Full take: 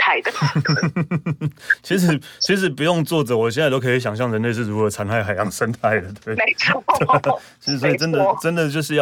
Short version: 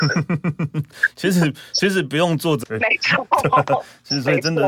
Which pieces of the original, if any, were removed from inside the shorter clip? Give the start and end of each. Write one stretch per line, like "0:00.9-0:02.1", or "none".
0:03.3-0:06.2